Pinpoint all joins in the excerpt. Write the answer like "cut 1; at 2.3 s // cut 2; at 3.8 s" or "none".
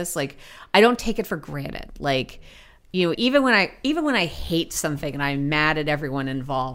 cut 1; at 3.1 s